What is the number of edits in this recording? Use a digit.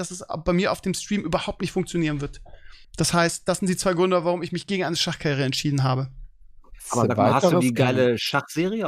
1